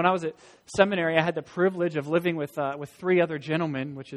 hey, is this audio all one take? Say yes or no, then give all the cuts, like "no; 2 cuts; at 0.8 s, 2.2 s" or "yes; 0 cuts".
yes; 0 cuts